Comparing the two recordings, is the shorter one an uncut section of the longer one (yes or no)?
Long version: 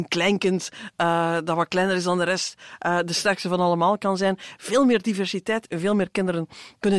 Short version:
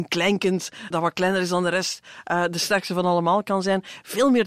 no